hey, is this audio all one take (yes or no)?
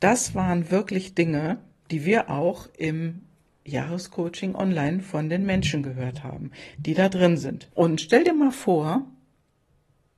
no